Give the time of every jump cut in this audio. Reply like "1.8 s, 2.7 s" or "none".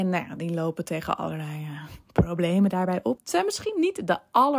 3.2 s